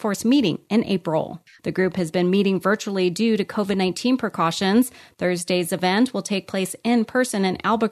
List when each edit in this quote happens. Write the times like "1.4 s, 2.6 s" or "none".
1.6 s